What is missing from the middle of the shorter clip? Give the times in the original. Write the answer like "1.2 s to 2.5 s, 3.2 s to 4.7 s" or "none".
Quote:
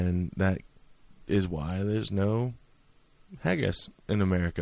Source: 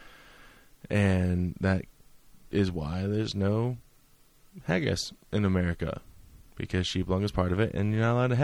none